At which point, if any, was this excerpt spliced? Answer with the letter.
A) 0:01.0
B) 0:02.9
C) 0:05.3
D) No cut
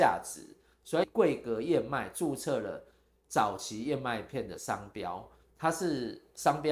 A